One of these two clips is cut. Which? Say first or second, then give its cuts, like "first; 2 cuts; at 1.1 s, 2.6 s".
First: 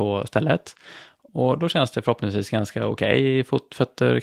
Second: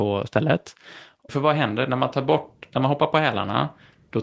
second; 1 cut; at 1.3 s